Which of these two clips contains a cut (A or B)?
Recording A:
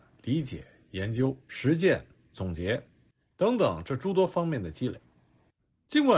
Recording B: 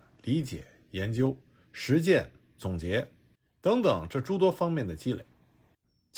A